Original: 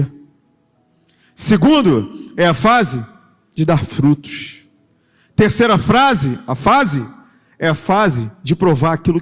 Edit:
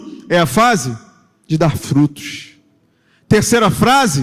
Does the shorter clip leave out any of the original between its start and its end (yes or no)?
no